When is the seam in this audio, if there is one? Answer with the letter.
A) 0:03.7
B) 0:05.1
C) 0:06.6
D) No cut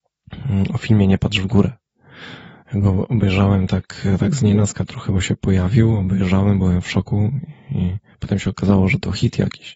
D